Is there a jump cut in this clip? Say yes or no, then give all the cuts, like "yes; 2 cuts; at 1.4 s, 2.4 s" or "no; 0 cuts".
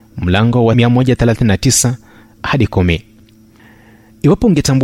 yes; 1 cut; at 2.2 s